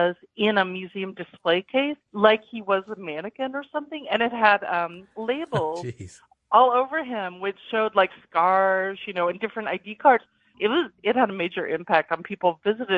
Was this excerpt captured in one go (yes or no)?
no